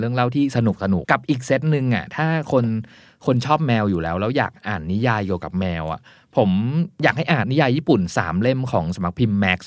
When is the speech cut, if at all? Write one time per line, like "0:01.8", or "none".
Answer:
0:01.0
0:07.4

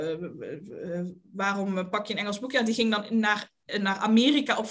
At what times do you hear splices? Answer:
none

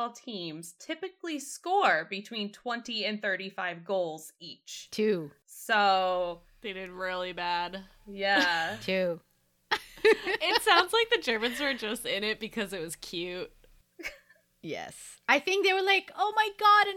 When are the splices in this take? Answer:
none

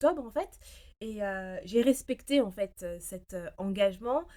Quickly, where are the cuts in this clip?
none

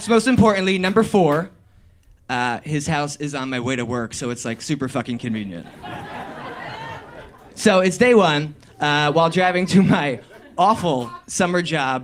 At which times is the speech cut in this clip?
none

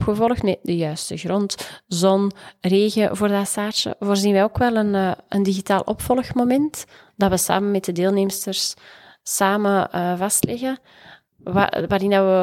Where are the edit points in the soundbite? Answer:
none

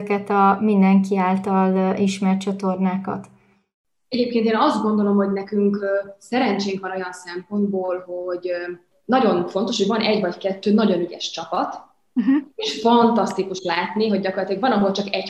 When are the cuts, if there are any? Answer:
none

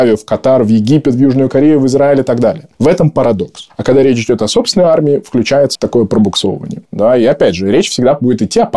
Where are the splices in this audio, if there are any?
0:05.8
0:06.9

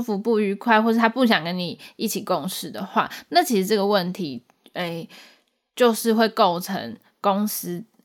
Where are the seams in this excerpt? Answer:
none

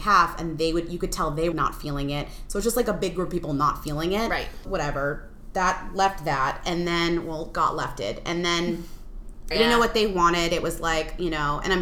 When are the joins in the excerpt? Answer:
0:01.5
0:04.6
0:09.5

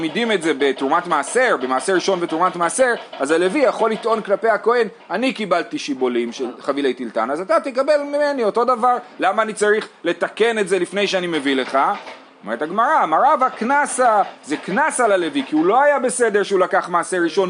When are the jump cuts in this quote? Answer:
none

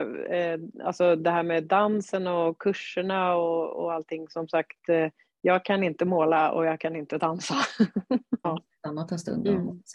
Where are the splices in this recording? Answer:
0:08.4

